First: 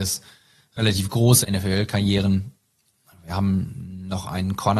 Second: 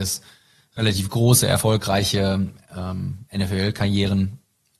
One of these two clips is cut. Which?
first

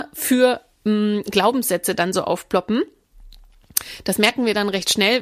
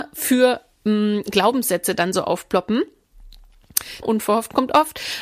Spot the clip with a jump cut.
second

